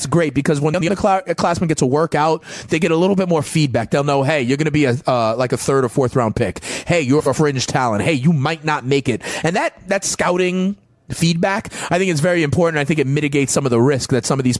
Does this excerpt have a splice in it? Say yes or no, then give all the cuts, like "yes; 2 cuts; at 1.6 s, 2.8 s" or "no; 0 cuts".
no; 0 cuts